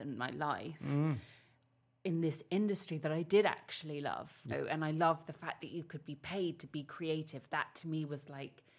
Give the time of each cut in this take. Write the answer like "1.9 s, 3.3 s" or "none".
4.5 s